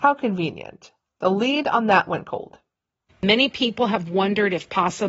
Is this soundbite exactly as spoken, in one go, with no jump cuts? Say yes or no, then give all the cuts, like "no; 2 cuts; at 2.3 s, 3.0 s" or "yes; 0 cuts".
no; 1 cut; at 3.1 s